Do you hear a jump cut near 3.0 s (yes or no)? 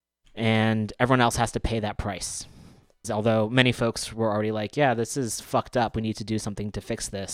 yes